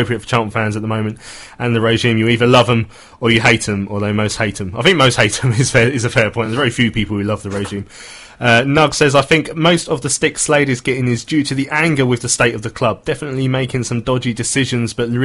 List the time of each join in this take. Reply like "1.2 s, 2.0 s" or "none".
none